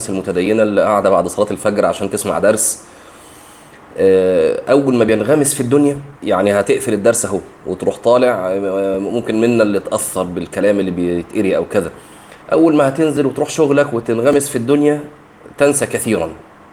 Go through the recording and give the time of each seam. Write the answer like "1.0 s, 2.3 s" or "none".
6.2 s, 12.4 s